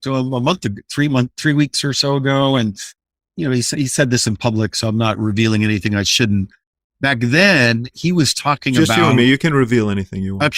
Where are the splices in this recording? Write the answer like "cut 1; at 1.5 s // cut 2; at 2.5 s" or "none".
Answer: none